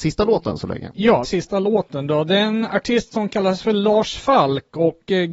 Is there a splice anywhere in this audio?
yes; 1 cut; at 1.2 s

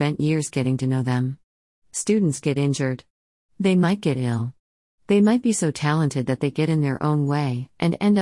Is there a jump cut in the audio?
no; 0 cuts

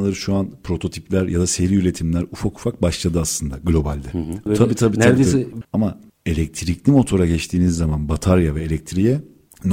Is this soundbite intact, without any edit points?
no; 2 cuts; at 4.5 s, 5.6 s

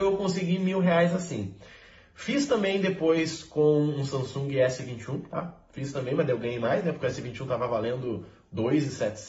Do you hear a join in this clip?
no; 0 cuts

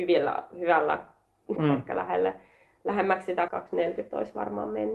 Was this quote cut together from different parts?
yes; 2 cuts; at 1.6 s, 3.5 s

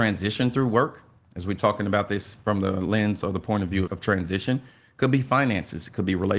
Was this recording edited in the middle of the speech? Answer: yes; 1 cut; at 3.9 s

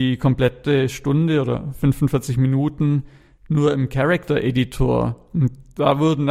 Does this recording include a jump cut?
no; 0 cuts

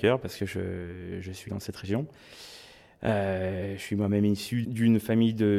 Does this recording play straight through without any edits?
no; 2 cuts; at 1.5 s, 4.6 s

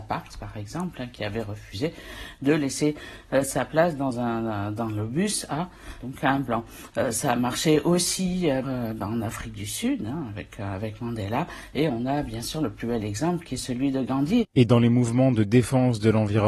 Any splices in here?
yes; 1 cut; at 8.6 s

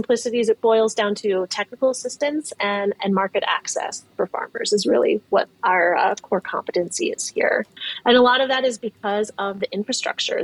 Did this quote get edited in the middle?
no; 0 cuts

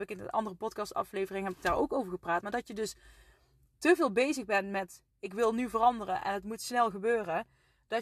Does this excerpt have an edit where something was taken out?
no; 0 cuts

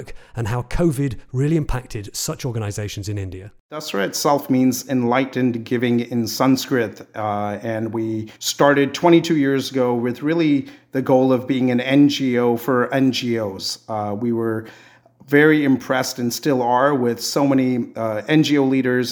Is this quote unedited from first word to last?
no; 1 cut; at 8.4 s

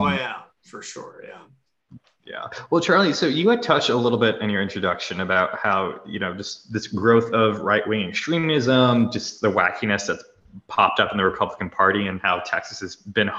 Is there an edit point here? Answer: no; 0 cuts

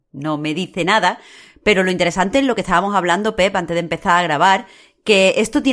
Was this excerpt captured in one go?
yes; 0 cuts

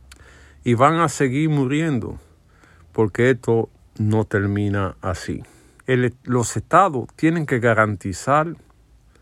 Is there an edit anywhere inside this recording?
yes; 1 cut; at 5.8 s

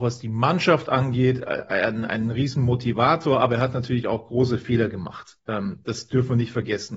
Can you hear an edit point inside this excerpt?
no; 0 cuts

